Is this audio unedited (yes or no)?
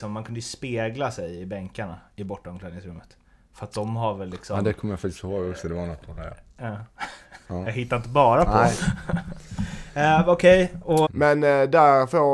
no